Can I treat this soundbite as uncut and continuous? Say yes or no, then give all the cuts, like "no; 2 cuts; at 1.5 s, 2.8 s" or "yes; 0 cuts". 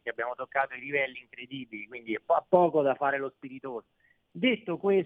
yes; 0 cuts